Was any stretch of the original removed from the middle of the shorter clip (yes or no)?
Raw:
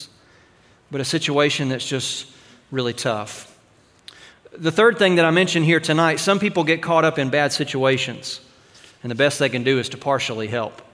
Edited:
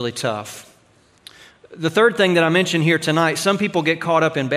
no